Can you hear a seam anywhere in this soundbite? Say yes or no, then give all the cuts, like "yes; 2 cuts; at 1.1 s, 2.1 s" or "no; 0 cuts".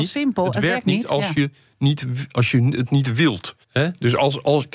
yes; 1 cut; at 3.6 s